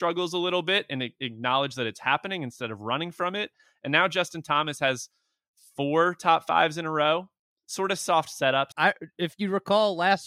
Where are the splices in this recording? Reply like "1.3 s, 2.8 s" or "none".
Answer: 8.7 s